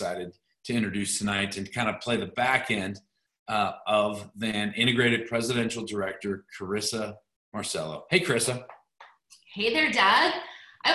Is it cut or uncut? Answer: uncut